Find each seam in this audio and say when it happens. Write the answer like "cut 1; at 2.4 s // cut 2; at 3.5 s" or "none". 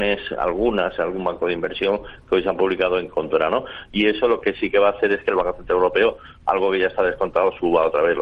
cut 1; at 3.9 s